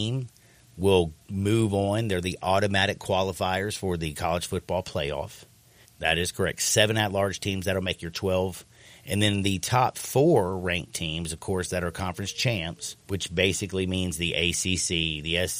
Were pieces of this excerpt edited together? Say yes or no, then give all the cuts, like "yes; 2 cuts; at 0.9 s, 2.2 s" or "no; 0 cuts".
yes; 2 cuts; at 5.8 s, 13.0 s